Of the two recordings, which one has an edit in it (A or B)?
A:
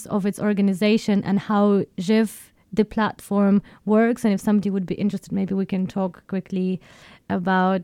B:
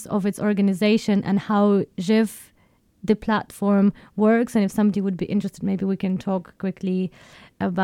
A